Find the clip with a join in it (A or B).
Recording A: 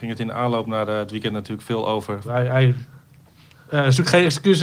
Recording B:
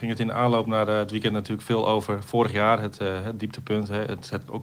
A